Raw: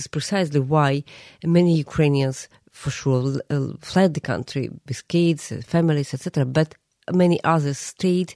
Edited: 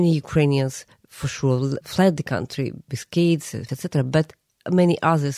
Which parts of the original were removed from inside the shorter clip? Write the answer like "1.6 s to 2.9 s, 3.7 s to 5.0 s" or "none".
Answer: 3.4 s to 3.8 s, 5.7 s to 6.1 s